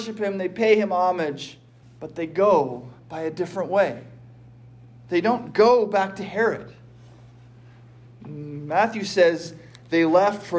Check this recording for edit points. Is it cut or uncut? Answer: cut